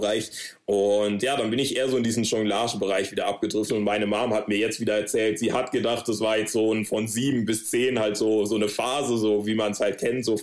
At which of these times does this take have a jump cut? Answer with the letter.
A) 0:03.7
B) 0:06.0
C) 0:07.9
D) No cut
D